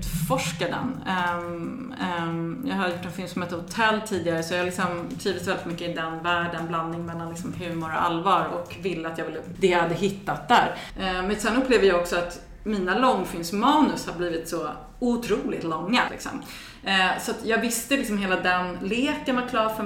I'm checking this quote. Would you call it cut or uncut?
cut